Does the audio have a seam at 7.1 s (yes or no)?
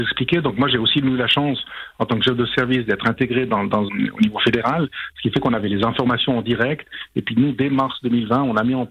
no